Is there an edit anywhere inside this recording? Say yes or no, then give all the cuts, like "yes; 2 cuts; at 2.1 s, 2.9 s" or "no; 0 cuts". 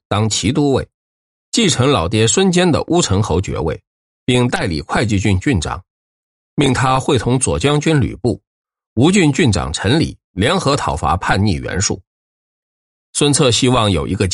no; 0 cuts